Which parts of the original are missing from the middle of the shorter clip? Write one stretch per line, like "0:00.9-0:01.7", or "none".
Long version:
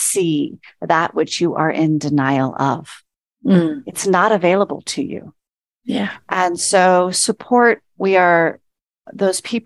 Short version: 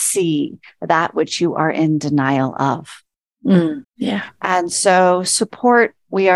0:03.8-0:05.7